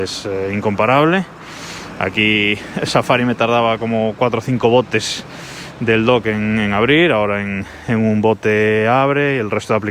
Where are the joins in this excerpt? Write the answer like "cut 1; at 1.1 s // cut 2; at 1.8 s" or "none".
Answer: none